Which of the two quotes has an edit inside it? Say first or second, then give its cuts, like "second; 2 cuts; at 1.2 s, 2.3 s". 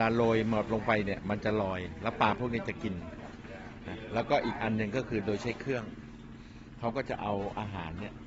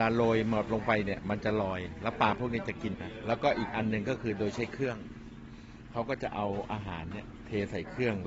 second; 1 cut; at 2.9 s